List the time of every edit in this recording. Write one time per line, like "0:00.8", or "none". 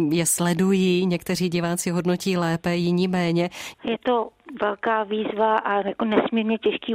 0:03.7